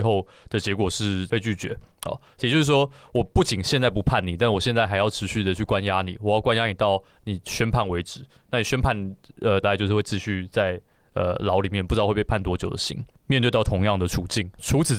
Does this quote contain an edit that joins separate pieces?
yes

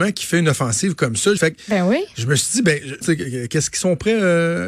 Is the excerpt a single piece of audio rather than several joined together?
no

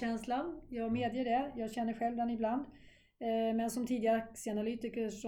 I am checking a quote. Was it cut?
no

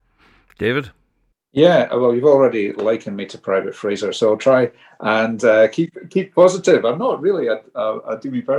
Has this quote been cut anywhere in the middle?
no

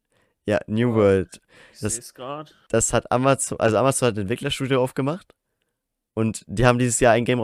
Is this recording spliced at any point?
no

